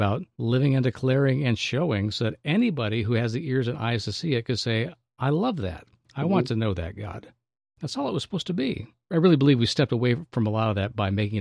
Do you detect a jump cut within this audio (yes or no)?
no